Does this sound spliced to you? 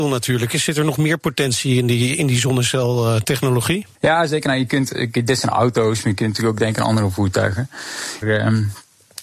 yes; 2 cuts; at 3.9 s, 8.2 s

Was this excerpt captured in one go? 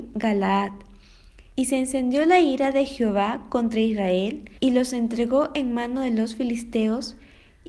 no; 2 cuts; at 1.5 s, 4.6 s

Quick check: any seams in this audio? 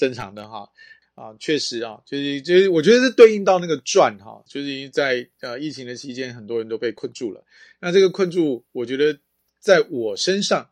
yes; 2 cuts; at 1.0 s, 4.5 s

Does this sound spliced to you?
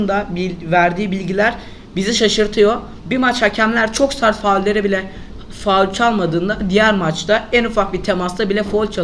no; 0 cuts

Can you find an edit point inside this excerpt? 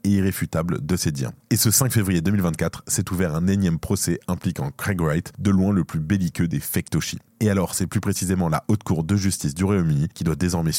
no; 0 cuts

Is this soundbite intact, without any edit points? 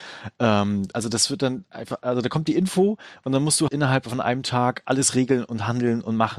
no; 2 cuts; at 0.9 s, 3.7 s

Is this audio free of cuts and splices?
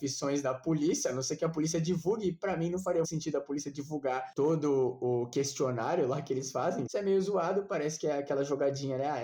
no; 2 cuts; at 3.0 s, 6.9 s

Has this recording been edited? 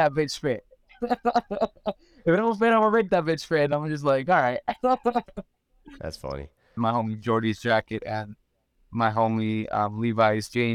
yes; 1 cut; at 6.8 s

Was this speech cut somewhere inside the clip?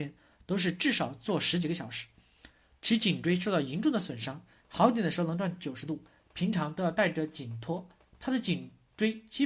yes; 1 cut; at 4.6 s

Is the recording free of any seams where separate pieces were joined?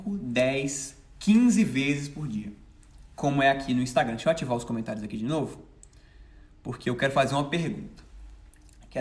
yes; 0 cuts

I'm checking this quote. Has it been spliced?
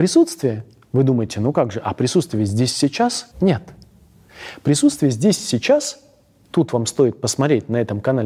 yes; 1 cut; at 3.3 s

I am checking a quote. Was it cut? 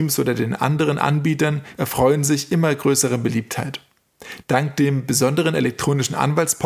yes; 2 cuts; at 1.7 s, 4.4 s

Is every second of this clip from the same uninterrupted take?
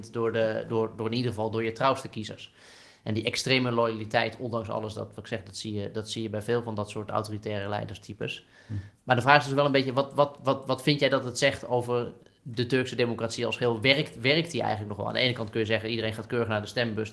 yes; 0 cuts

